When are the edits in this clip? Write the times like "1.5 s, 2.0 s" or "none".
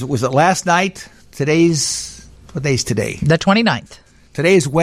none